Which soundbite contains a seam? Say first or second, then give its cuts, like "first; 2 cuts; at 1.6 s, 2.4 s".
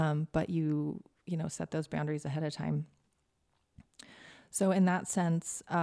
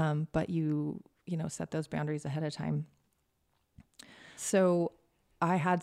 second; 1 cut; at 4.4 s